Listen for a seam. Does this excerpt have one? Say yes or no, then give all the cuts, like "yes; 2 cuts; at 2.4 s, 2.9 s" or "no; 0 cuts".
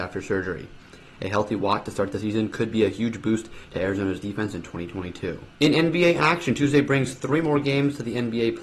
yes; 1 cut; at 5.5 s